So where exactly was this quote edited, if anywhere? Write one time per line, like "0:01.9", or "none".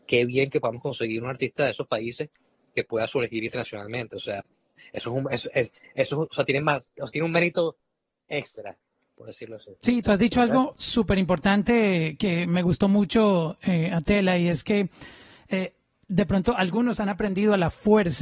none